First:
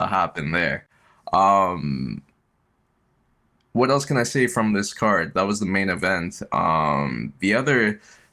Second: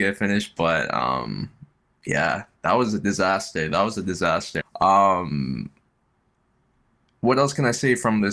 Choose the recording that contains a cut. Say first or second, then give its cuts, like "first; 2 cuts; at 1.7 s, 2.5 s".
second; 1 cut; at 4.6 s